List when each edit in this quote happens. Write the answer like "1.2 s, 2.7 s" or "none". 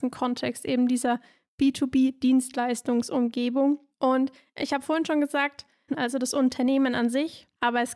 5.9 s